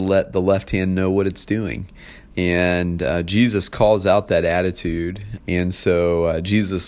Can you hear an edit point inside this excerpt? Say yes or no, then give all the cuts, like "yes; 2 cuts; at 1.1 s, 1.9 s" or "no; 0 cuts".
yes; 2 cuts; at 2.3 s, 5.4 s